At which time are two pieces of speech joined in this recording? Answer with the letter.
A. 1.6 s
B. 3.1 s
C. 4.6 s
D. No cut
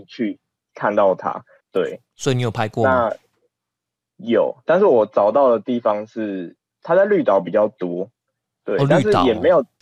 A